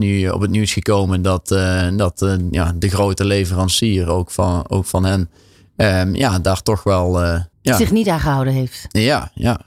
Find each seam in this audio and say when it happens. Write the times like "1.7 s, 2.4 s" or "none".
7.5 s